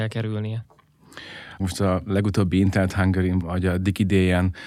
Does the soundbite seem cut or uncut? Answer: cut